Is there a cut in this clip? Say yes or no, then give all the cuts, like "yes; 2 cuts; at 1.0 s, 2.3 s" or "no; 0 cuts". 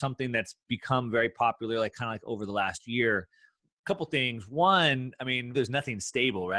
yes; 1 cut; at 5.5 s